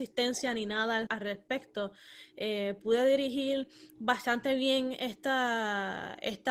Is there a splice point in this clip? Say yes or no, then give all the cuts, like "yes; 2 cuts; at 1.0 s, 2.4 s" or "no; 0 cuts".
yes; 1 cut; at 1.1 s